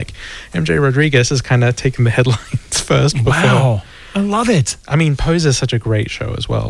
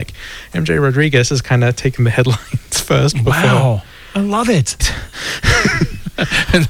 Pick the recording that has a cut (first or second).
second